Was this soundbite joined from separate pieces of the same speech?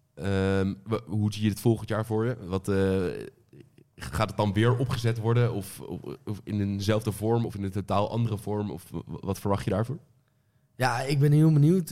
no; 0 cuts

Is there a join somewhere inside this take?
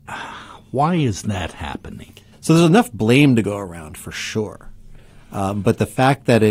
yes; 1 cut; at 2.3 s

